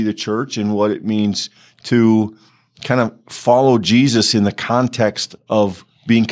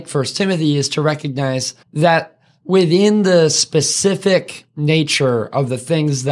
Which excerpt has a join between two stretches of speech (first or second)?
second